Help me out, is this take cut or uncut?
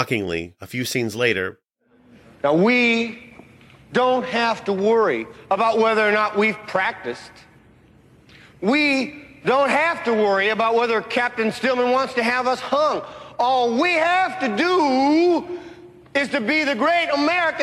uncut